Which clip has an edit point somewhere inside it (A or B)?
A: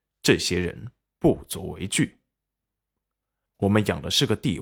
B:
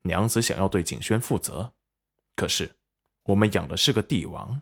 A